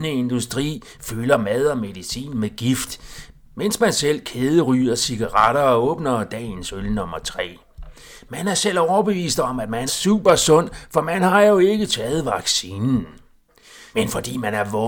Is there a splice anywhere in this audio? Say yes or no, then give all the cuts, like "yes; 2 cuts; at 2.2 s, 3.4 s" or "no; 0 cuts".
yes; 2 cuts; at 9.9 s, 13.9 s